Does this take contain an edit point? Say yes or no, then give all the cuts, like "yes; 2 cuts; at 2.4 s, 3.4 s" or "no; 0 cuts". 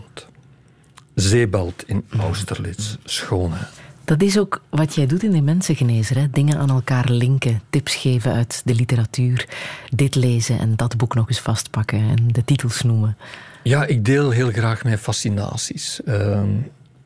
no; 0 cuts